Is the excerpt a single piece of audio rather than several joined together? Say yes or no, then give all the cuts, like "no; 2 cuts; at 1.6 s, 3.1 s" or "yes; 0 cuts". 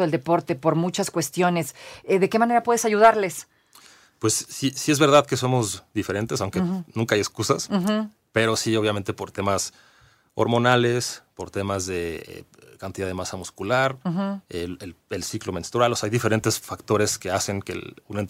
yes; 0 cuts